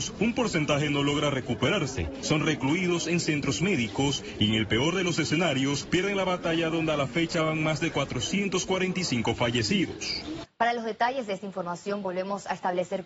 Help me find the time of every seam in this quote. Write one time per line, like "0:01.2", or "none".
0:10.4

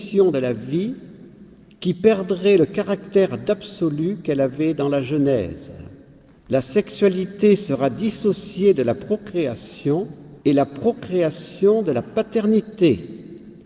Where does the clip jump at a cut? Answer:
0:06.3
0:10.4

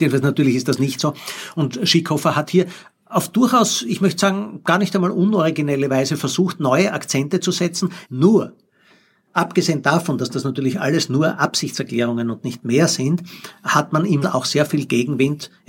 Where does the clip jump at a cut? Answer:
0:08.0
0:14.2

